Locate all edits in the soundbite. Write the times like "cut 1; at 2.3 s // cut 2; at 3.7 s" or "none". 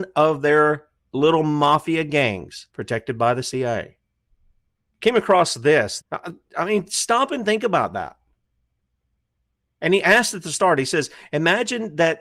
cut 1; at 2.7 s // cut 2; at 4.9 s // cut 3; at 6.0 s